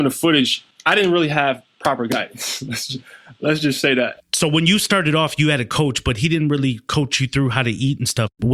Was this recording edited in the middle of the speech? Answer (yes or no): no